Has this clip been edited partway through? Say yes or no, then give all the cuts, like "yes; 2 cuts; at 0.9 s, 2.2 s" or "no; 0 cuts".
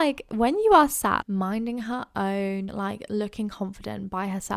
yes; 2 cuts; at 1.2 s, 2.7 s